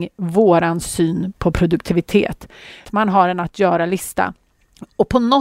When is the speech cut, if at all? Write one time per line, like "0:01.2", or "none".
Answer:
0:02.8